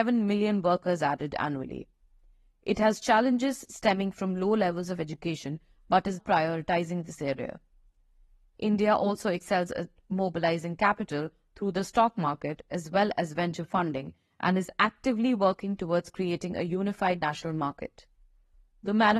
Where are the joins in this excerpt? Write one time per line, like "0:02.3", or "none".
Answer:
0:06.2